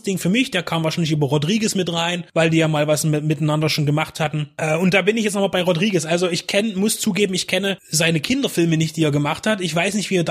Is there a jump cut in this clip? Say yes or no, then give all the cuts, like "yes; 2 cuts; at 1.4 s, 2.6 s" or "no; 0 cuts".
no; 0 cuts